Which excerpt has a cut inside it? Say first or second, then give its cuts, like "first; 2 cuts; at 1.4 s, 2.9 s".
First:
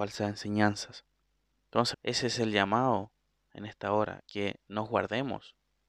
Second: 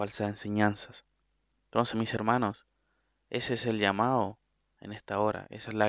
first; 2 cuts; at 1.9 s, 4.2 s